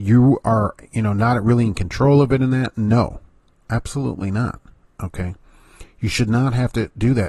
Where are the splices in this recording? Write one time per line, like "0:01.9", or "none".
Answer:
none